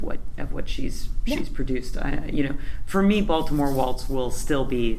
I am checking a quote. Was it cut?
no; 0 cuts

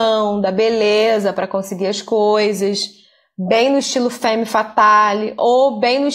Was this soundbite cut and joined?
no; 0 cuts

